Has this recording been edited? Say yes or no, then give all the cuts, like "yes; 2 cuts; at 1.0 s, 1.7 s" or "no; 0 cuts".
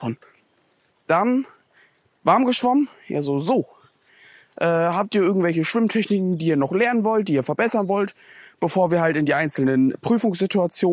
no; 0 cuts